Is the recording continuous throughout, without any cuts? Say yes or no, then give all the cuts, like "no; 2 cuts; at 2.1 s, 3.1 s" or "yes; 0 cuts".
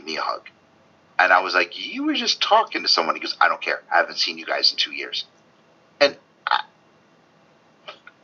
yes; 0 cuts